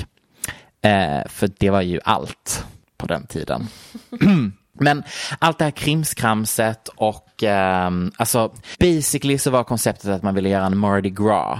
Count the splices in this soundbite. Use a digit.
0